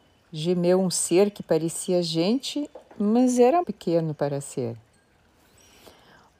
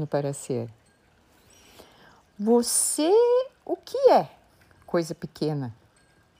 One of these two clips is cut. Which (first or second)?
first